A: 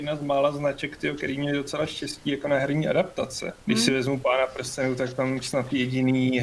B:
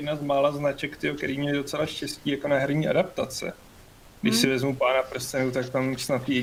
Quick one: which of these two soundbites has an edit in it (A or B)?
A